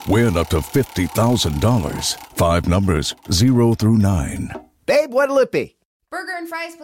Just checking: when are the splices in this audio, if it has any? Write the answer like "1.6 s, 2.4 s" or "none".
2.3 s